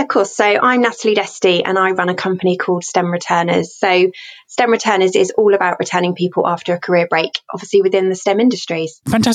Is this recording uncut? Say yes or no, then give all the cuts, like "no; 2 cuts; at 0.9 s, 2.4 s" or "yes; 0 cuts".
yes; 0 cuts